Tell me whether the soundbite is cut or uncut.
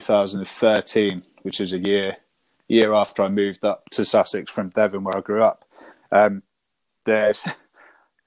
uncut